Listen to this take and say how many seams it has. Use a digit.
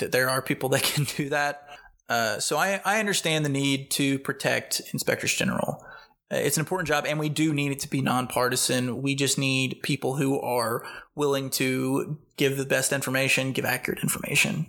0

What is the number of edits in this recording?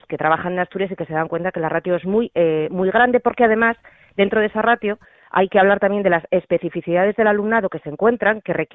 0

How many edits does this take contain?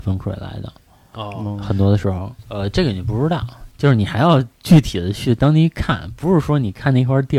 1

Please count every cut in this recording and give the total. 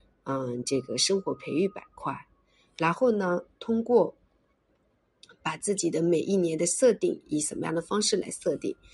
0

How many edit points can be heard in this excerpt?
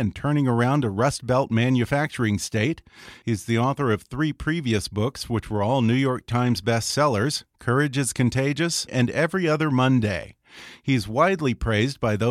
1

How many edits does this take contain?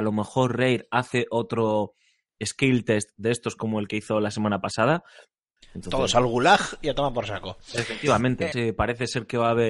2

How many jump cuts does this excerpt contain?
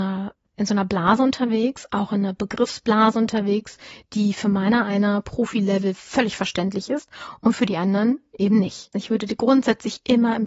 1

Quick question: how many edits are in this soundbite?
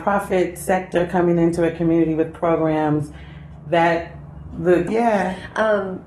1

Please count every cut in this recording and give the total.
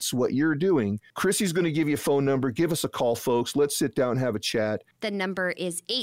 1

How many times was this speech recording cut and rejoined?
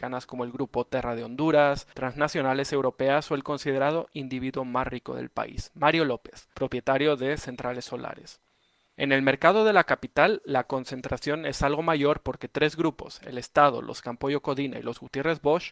0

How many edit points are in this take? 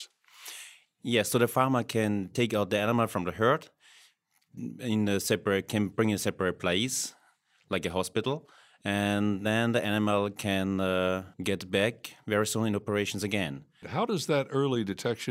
2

